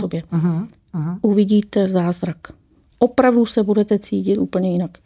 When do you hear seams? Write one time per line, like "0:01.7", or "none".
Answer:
none